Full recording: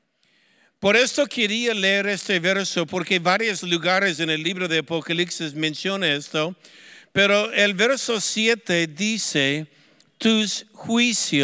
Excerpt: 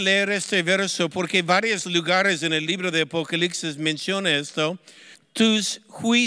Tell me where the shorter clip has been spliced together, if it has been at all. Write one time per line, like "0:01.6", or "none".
0:05.1